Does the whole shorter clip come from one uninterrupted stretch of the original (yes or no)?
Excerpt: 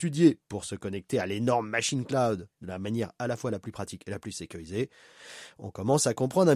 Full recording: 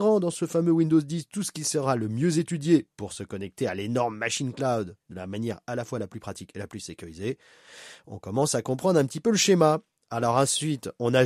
yes